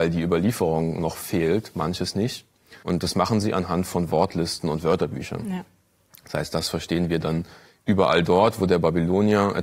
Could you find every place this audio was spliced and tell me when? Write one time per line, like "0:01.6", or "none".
0:02.8